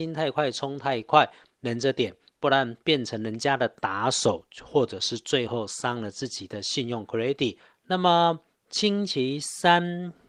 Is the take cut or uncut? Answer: uncut